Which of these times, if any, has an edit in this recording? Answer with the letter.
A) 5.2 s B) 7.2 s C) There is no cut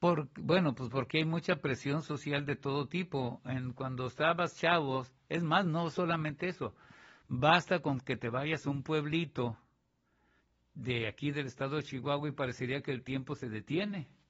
C